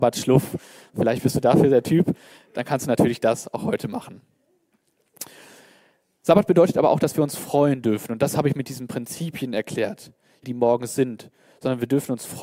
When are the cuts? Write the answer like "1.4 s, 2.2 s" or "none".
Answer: 10.4 s